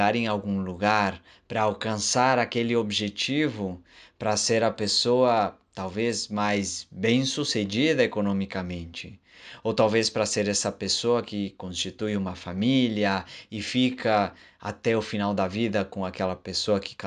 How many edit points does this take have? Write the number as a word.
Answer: zero